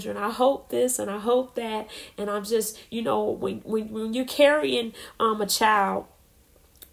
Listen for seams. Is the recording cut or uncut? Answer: uncut